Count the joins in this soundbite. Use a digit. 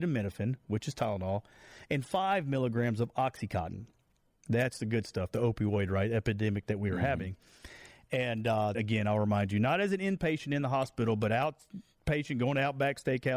1